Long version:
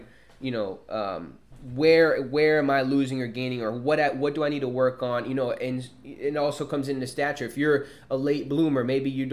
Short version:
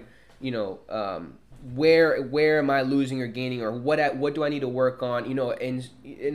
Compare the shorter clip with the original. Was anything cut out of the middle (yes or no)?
no